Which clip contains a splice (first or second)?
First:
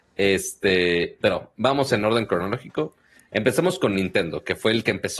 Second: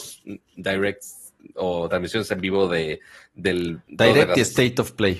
first